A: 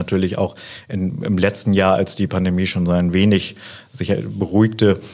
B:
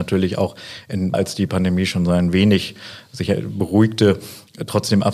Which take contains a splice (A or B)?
B